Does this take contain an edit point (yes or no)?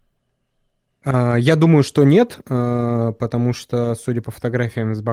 no